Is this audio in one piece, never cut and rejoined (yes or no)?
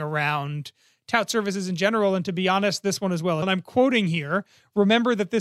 no